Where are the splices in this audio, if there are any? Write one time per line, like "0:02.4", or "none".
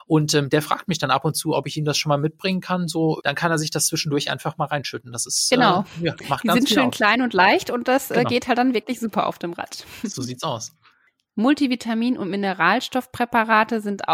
0:03.2